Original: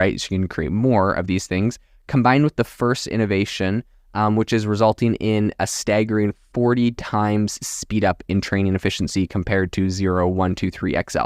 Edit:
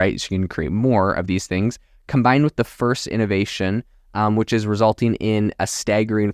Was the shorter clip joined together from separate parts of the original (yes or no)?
no